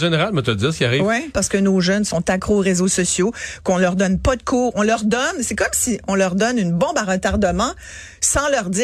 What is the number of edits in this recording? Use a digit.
1